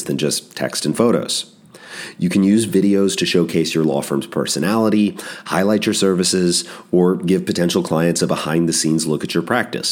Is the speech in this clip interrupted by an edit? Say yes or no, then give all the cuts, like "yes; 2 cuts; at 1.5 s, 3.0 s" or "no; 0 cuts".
no; 0 cuts